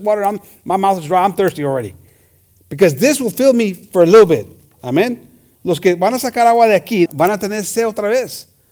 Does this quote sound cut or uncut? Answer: cut